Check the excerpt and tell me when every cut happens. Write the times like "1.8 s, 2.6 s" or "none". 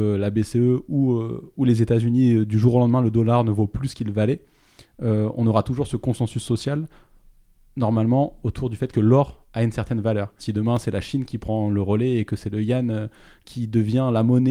10.4 s